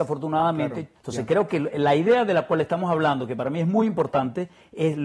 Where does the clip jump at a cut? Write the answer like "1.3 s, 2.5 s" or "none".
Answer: 0.9 s